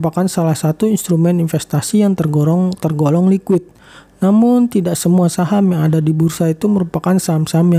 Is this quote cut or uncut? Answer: uncut